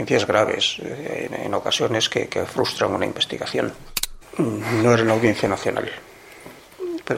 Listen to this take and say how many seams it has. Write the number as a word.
one